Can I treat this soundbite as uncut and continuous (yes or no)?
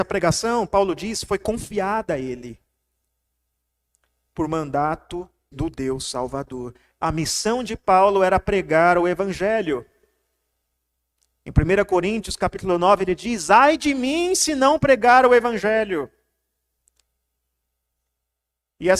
no